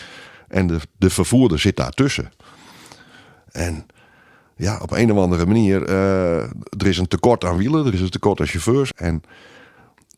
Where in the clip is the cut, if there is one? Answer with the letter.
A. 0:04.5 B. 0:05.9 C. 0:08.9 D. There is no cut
C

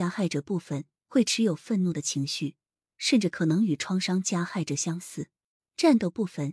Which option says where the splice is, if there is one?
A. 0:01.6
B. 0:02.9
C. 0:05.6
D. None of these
C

